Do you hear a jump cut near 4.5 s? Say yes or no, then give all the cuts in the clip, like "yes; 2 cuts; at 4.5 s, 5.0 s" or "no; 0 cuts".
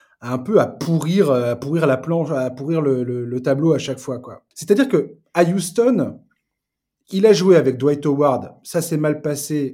yes; 1 cut; at 4.5 s